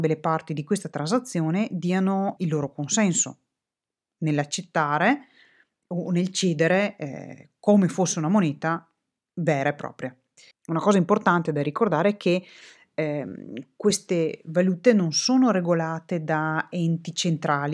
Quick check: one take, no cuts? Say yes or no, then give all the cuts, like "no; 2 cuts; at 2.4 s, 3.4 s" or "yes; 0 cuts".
no; 2 cuts; at 2.4 s, 10.5 s